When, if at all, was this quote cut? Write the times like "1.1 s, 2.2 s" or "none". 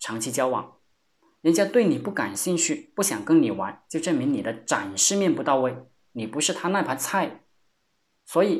none